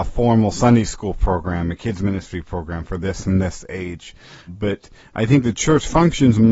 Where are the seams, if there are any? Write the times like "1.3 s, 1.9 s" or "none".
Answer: 4.5 s

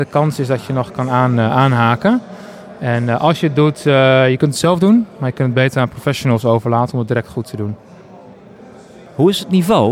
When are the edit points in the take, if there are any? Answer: none

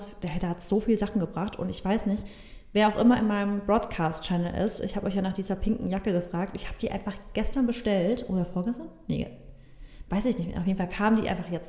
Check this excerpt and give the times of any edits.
none

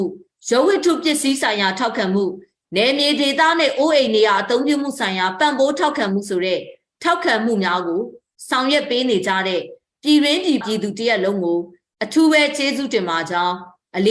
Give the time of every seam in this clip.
10.6 s

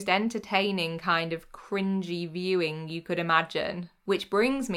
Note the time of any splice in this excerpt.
none

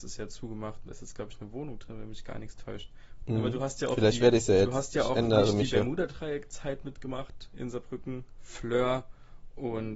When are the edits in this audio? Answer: 3.2 s, 8.4 s

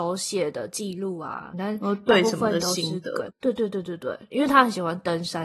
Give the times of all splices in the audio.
1.5 s, 3.3 s, 4.3 s

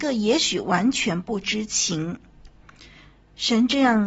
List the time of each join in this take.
none

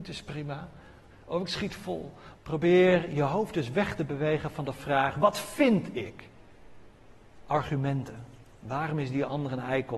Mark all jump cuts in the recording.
1.1 s, 2.3 s

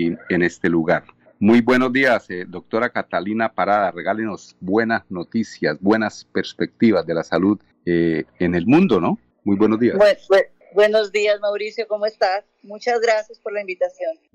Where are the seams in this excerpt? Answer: none

